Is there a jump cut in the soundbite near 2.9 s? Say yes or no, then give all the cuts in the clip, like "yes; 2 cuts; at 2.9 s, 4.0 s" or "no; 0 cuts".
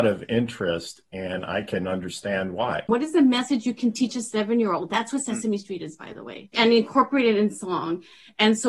yes; 1 cut; at 2.9 s